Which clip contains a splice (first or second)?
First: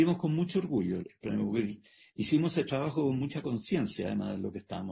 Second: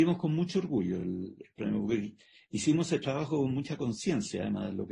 first